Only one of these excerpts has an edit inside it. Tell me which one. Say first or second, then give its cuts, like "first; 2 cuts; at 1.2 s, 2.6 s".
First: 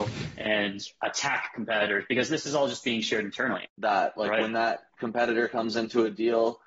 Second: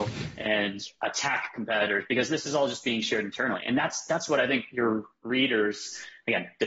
first; 1 cut; at 3.6 s